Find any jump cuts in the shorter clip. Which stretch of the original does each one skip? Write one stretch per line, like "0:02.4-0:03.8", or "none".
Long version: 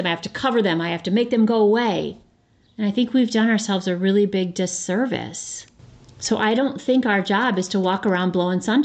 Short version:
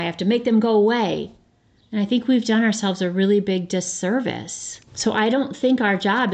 0:05.7-0:06.1